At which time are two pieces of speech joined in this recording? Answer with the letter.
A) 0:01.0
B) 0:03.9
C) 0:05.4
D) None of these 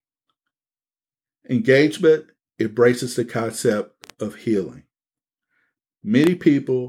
D